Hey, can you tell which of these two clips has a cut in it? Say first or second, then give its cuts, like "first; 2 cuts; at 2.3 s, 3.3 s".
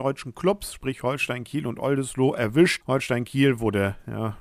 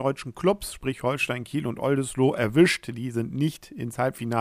first; 1 cut; at 2.8 s